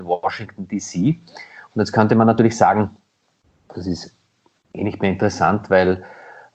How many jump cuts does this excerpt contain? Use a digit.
0